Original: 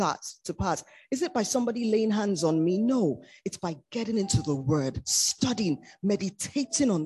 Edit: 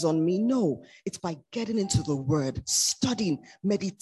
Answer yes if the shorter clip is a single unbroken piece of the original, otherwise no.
yes